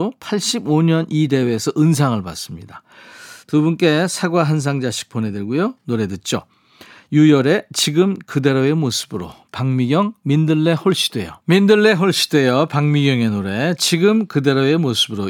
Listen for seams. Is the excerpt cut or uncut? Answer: cut